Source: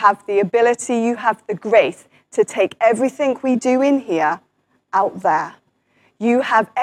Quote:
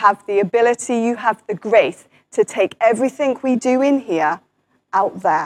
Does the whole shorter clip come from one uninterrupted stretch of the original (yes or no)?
yes